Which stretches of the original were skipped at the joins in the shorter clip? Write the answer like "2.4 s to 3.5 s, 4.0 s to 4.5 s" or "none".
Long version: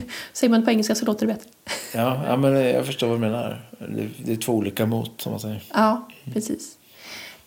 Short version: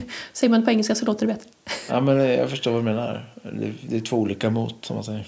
1.9 s to 2.2 s